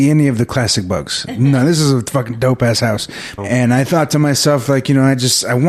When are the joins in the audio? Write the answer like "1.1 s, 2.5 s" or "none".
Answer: 3.4 s